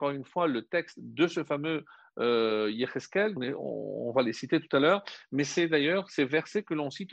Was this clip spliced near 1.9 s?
no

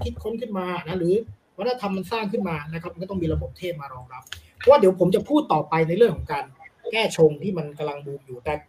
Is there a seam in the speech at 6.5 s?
no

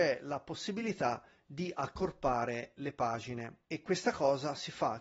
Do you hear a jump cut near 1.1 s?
no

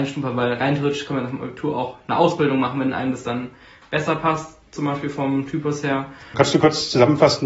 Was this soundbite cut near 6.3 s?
yes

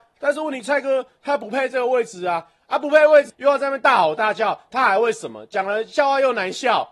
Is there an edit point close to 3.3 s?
yes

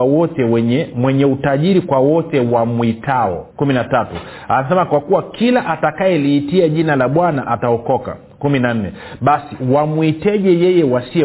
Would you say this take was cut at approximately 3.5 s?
yes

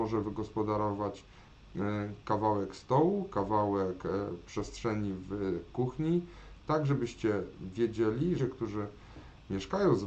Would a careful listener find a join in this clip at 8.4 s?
yes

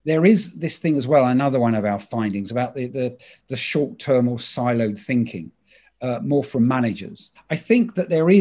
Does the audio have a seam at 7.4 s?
yes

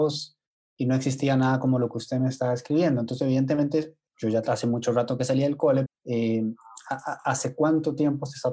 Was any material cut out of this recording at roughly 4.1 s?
yes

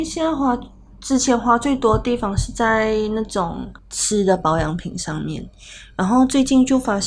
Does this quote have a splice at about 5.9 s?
no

